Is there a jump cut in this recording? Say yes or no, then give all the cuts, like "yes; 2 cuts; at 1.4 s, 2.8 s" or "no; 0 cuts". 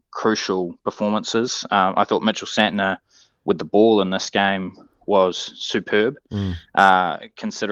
no; 0 cuts